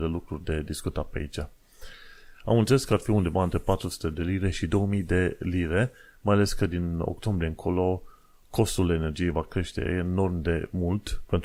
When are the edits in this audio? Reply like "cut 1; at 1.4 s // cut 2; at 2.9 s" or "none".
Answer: cut 1; at 2.3 s